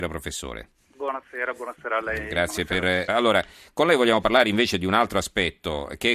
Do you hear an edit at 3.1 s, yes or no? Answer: yes